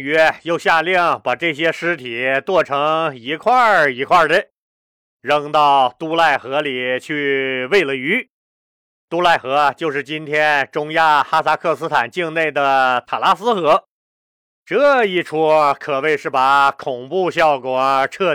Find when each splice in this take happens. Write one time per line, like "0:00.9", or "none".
none